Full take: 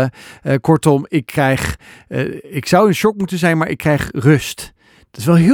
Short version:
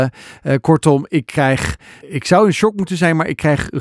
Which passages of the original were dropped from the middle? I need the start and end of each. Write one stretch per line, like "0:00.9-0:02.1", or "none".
0:02.0-0:02.4